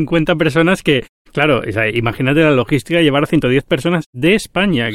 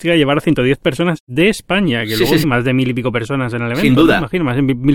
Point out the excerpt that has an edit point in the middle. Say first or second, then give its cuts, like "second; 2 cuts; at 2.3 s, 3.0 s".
second; 1 cut; at 2.4 s